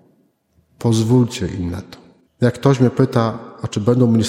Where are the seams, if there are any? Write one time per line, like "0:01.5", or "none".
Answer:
0:02.3